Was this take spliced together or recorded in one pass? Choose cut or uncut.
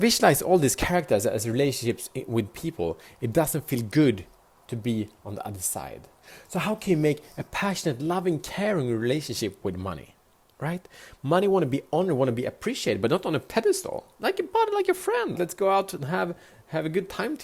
cut